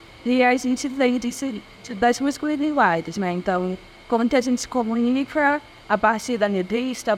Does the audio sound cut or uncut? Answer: uncut